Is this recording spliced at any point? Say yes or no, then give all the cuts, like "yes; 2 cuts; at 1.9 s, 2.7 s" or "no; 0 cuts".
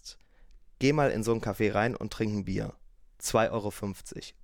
no; 0 cuts